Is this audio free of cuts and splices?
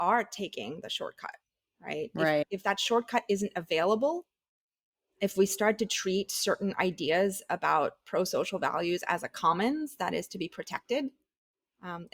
yes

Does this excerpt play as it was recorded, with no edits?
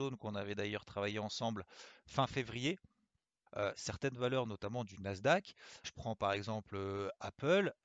no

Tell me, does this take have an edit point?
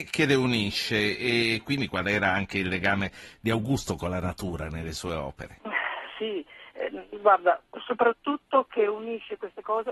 yes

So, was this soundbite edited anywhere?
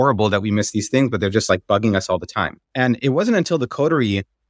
no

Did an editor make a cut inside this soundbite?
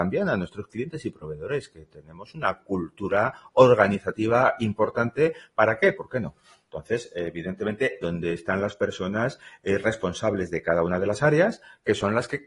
yes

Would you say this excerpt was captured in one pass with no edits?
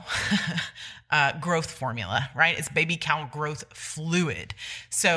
yes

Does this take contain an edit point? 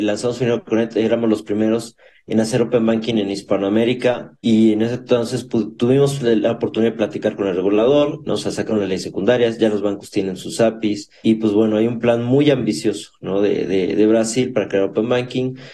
yes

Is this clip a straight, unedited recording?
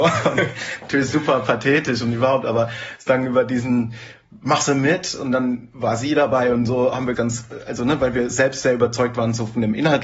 no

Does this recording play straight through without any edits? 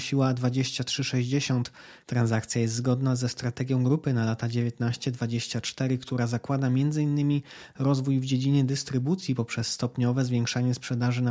no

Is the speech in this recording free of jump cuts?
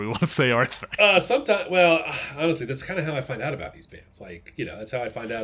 yes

